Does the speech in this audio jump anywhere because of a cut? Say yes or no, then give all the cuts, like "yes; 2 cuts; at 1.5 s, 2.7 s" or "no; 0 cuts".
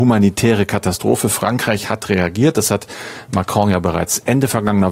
no; 0 cuts